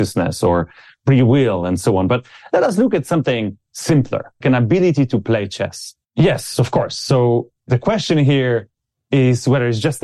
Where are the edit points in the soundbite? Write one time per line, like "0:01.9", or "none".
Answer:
0:04.4
0:06.0